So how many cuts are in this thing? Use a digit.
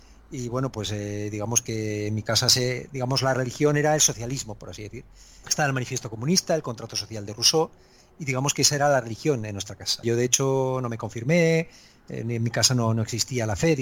2